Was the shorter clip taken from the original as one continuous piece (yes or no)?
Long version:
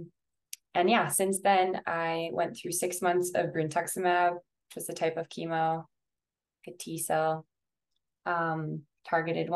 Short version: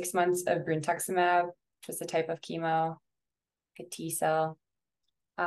yes